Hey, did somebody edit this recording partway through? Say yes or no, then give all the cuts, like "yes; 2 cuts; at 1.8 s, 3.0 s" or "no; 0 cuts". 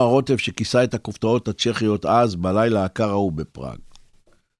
no; 0 cuts